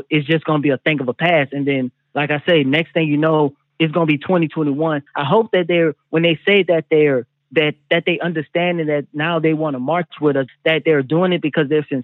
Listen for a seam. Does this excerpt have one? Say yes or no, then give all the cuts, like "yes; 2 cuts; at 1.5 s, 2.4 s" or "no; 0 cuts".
yes; 2 cuts; at 5.1 s, 10.5 s